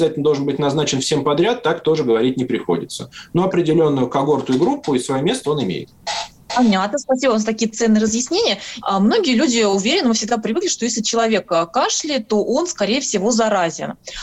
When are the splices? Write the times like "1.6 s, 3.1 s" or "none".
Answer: 8.8 s